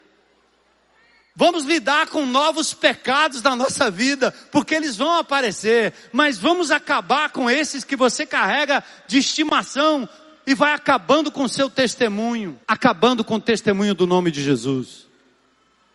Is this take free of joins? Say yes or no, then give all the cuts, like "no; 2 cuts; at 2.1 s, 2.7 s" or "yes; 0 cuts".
no; 2 cuts; at 1.3 s, 12.6 s